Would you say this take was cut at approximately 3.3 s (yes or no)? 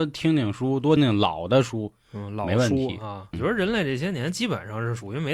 yes